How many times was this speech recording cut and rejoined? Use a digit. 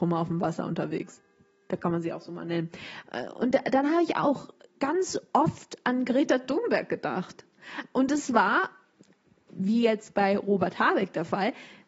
0